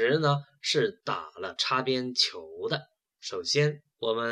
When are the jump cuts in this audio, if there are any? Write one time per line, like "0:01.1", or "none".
0:03.1